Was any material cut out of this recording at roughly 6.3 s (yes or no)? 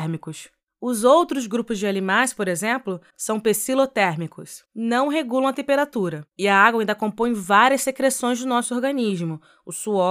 yes